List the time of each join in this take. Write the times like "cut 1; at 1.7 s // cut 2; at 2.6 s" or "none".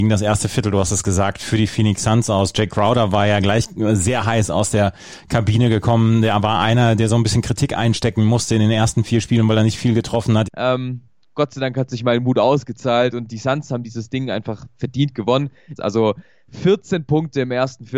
cut 1; at 10.4 s // cut 2; at 15.8 s